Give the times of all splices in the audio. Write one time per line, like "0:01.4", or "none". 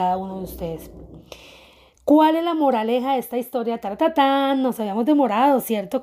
none